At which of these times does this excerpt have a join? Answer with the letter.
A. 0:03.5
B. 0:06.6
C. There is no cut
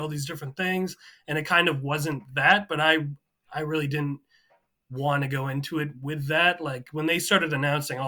C